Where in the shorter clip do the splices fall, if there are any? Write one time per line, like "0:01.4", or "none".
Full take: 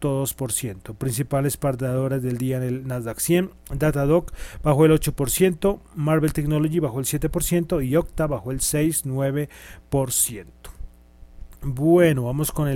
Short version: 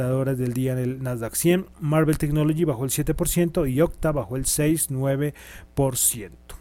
0:01.7